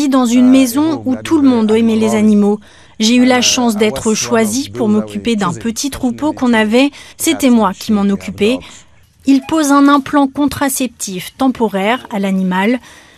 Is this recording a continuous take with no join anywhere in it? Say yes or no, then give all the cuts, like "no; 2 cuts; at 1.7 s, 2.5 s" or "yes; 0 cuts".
no; 2 cuts; at 7.1 s, 9.0 s